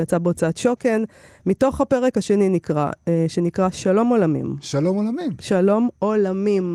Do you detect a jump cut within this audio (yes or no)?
no